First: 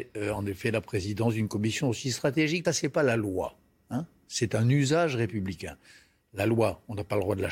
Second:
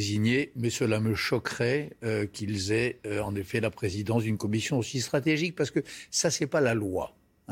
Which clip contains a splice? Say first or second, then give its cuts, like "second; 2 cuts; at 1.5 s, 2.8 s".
first; 1 cut; at 2.6 s